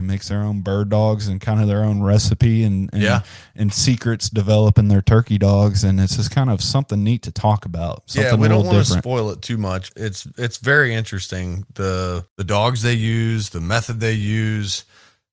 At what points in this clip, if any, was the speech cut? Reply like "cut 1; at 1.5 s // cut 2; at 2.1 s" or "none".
cut 1; at 9.9 s // cut 2; at 12.3 s